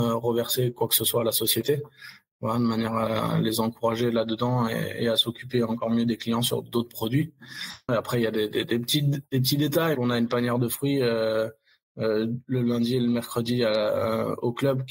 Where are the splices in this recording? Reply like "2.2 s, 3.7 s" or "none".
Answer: 7.9 s, 9.9 s